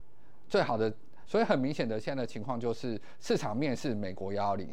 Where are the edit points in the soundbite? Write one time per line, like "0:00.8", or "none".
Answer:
0:01.2

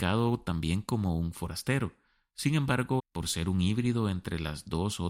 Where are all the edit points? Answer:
0:03.0

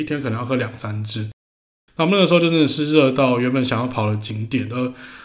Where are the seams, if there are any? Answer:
0:01.9

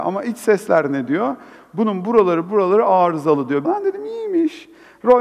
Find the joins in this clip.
0:02.4
0:03.6

